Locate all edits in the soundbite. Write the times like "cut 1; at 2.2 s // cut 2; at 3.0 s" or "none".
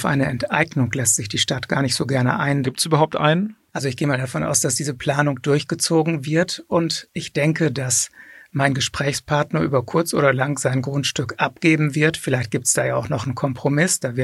cut 1; at 2.6 s